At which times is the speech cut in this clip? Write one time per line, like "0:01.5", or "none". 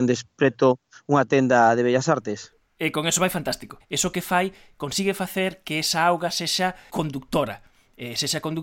0:03.8
0:06.9